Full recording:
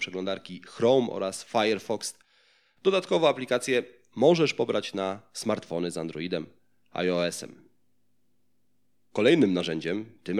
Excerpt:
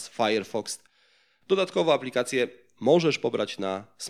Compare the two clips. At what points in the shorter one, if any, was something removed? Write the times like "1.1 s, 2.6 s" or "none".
none